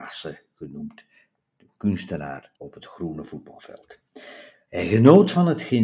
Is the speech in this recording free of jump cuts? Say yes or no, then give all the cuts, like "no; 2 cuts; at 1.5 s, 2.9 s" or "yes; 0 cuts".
no; 2 cuts; at 2.5 s, 4.7 s